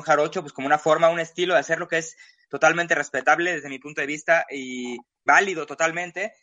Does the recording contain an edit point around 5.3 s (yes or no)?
yes